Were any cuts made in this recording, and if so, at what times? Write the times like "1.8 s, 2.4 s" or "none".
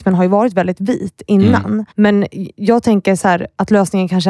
1.9 s